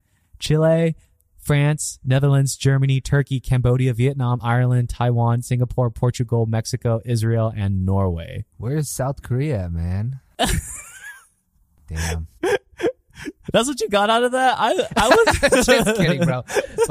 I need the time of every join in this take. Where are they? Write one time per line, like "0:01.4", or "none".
none